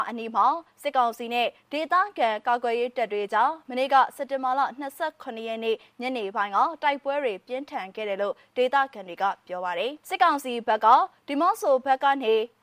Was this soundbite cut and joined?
yes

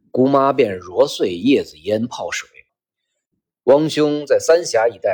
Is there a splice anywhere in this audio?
yes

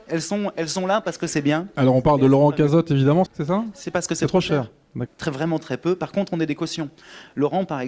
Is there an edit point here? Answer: yes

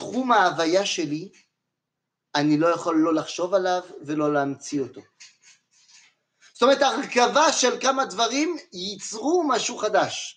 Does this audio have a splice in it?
yes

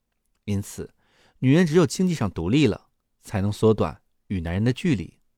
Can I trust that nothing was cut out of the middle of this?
yes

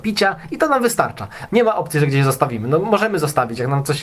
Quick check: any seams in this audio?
yes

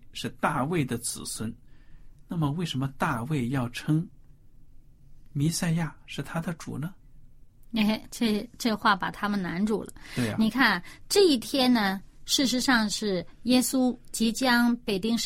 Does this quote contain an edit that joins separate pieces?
no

